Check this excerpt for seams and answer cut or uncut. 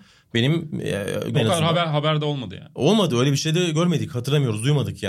cut